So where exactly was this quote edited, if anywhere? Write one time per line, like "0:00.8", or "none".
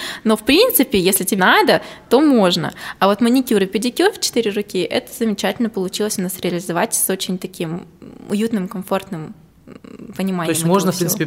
0:01.4